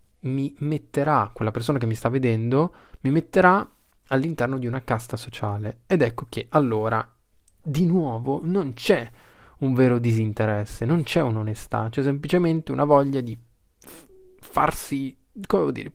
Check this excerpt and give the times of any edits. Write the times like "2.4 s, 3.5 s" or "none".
none